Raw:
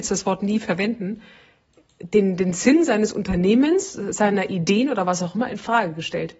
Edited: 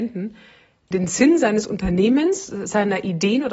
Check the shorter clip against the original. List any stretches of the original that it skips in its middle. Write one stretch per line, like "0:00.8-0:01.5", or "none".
0:01.8-0:02.4